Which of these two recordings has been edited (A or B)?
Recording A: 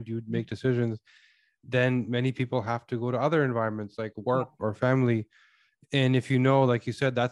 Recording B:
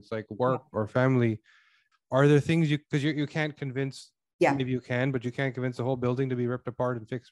B